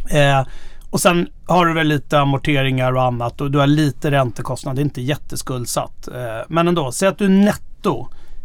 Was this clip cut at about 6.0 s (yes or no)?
no